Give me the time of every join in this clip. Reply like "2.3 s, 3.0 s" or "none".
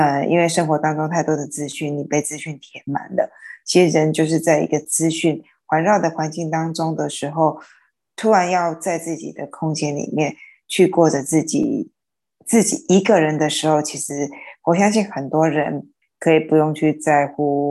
16.0 s